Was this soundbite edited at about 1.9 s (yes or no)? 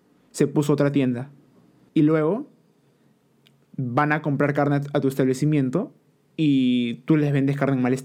yes